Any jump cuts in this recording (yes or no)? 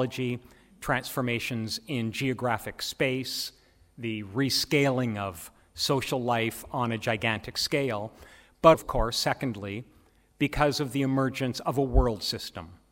yes